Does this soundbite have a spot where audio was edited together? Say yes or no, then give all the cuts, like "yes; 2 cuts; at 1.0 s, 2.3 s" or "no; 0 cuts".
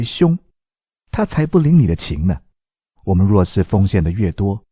yes; 1 cut; at 2.9 s